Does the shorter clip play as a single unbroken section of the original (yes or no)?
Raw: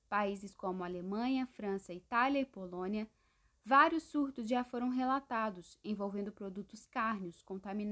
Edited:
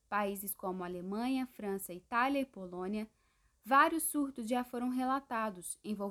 yes